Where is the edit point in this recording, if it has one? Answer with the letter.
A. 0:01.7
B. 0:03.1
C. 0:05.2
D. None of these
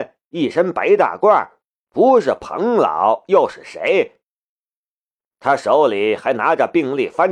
A